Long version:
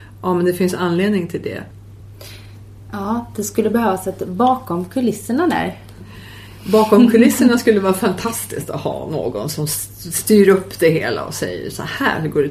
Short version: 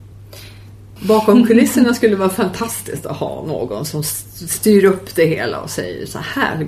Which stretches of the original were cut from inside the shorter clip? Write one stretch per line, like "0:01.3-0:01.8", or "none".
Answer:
0:02.8-0:06.6